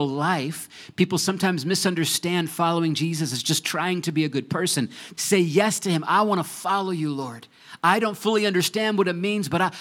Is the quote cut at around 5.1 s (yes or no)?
yes